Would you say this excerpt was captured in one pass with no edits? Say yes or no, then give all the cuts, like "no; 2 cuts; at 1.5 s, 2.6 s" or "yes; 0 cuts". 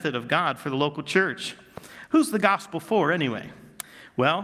no; 1 cut; at 2.1 s